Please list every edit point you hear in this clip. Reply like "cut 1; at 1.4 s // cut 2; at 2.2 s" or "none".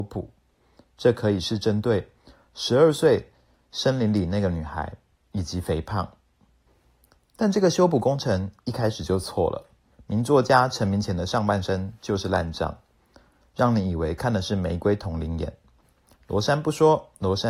cut 1; at 9.9 s